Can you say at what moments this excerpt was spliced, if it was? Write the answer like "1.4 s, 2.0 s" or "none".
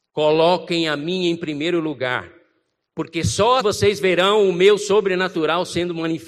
3.6 s